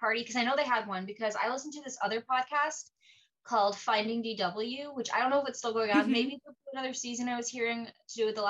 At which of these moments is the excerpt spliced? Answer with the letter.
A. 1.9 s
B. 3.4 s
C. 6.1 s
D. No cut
D